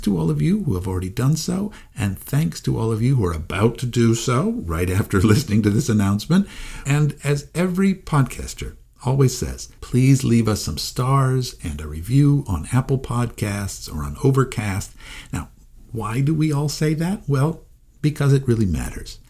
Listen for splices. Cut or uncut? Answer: cut